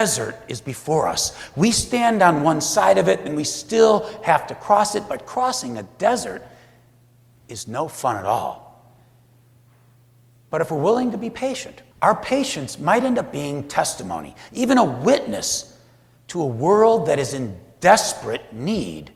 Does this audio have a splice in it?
yes; 1 cut; at 11.9 s

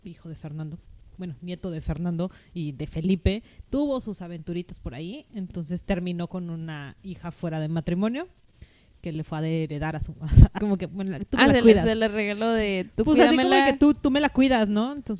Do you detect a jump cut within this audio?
yes; 1 cut; at 10.6 s

